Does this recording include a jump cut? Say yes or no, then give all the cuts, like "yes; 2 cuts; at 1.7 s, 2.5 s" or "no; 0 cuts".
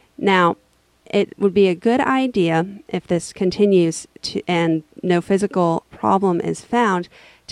no; 0 cuts